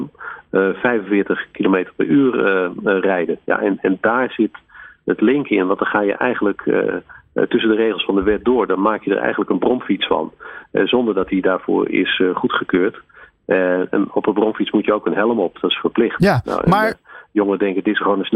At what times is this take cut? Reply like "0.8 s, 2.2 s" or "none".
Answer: none